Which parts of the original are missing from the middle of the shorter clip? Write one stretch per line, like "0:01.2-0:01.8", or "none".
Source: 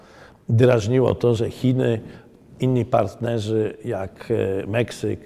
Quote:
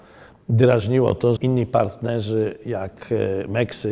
0:01.4-0:02.6